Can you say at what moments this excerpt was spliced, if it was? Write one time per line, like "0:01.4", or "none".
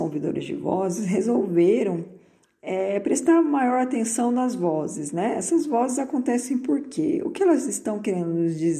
none